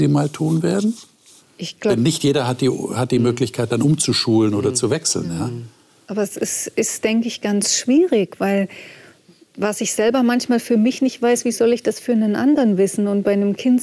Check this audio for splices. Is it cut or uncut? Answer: uncut